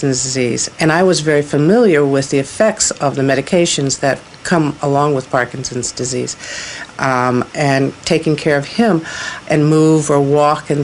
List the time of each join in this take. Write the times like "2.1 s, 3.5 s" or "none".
7.5 s, 9.5 s